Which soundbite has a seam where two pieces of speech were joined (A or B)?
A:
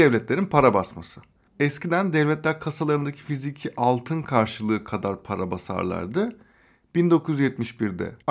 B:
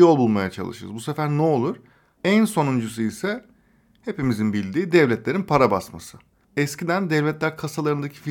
B